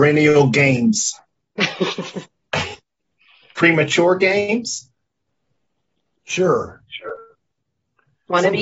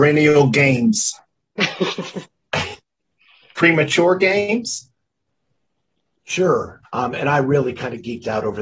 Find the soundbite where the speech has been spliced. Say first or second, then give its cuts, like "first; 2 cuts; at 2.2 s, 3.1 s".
second; 1 cut; at 6.8 s